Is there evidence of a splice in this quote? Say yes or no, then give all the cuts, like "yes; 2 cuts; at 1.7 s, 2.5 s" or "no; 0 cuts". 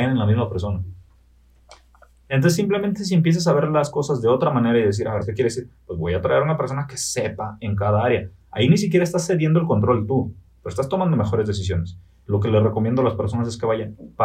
yes; 2 cuts; at 5.2 s, 12.2 s